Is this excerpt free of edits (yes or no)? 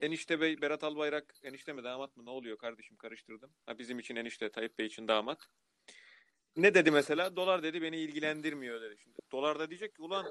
no